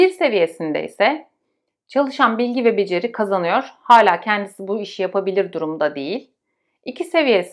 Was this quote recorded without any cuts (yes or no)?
yes